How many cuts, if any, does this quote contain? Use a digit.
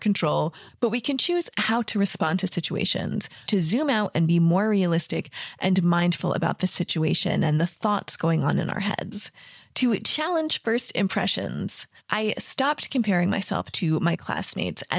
2